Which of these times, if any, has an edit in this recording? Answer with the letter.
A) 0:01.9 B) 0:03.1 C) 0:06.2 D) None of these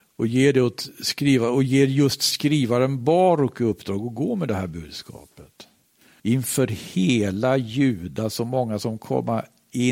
C